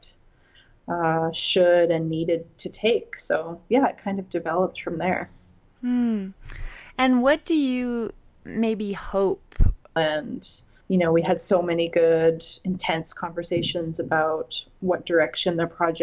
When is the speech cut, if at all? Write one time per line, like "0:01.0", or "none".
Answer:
0:10.0